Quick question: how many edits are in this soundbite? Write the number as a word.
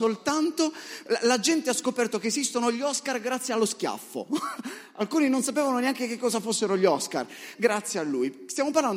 one